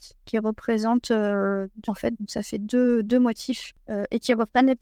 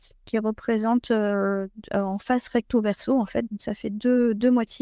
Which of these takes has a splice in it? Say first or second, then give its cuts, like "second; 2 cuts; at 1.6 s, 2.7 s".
first; 1 cut; at 1.9 s